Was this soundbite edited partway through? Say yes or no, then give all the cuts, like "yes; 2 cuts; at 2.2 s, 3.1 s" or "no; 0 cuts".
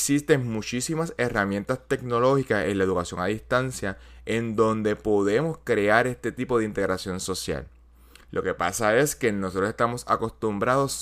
no; 0 cuts